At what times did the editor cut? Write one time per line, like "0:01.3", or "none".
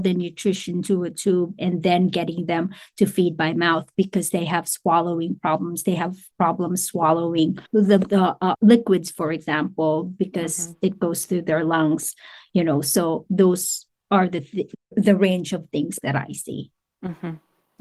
0:07.7